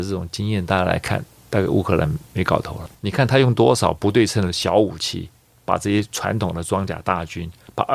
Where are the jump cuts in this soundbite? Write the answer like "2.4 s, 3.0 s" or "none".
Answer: 3.0 s